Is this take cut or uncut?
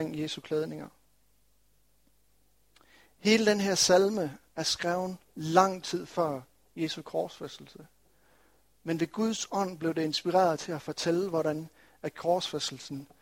uncut